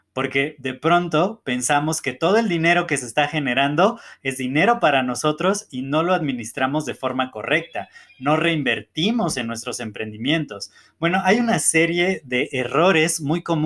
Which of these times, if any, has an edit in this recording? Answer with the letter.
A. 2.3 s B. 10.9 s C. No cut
C